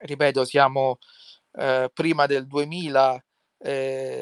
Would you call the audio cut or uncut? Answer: uncut